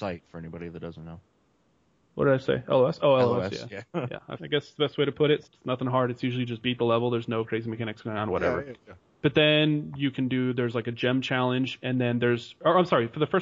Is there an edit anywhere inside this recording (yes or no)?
yes